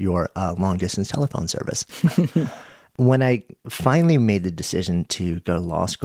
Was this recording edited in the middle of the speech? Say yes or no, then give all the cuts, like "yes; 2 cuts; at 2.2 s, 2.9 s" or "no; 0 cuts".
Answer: no; 0 cuts